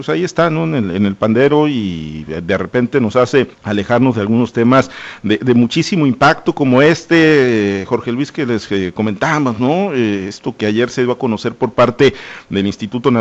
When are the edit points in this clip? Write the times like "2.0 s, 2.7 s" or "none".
3.5 s